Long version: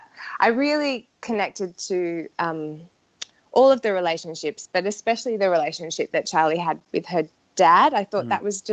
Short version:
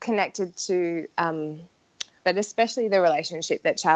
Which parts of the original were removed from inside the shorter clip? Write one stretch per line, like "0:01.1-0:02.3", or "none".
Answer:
0:03.4-0:04.7